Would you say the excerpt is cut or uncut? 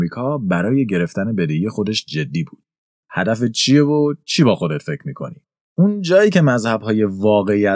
cut